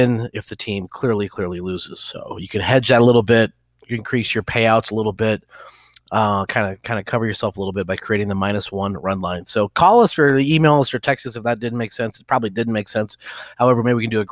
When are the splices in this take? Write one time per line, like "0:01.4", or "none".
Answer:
none